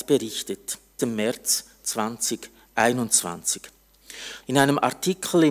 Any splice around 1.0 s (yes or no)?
yes